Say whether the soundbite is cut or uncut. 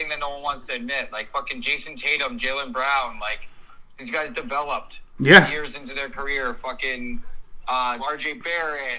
cut